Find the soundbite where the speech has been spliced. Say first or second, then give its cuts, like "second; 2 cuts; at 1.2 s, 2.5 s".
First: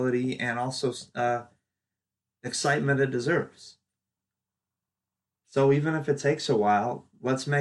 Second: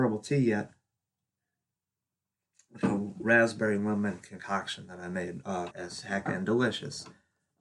second; 1 cut; at 5.7 s